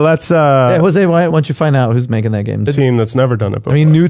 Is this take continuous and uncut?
no; 2 cuts; at 1.3 s, 2.7 s

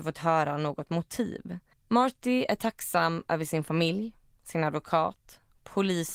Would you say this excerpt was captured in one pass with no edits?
no; 1 cut; at 1.7 s

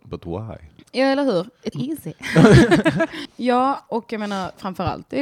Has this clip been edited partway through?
yes; 2 cuts; at 1.7 s, 3.3 s

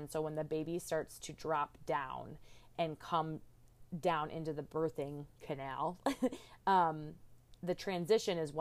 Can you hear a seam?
no; 0 cuts

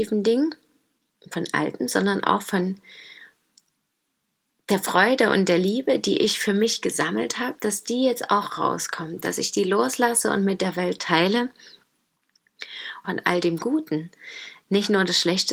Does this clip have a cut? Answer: yes; 1 cut; at 13.0 s

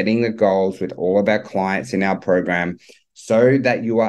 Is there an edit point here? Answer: no; 0 cuts

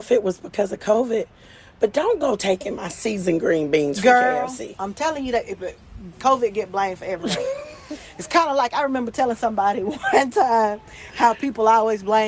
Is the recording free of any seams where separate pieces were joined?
no; 1 cut; at 6.1 s

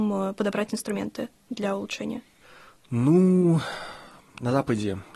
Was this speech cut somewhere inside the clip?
no; 0 cuts

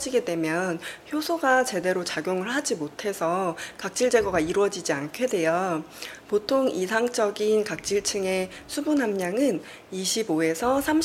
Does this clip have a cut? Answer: no; 0 cuts

